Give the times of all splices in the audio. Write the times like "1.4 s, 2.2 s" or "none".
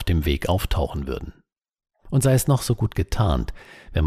1.9 s